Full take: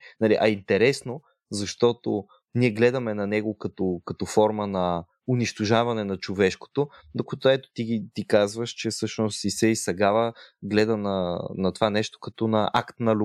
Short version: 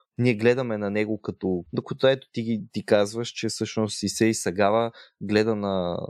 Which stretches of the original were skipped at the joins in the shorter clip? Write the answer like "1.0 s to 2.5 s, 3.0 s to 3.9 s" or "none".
4.0 s to 7.1 s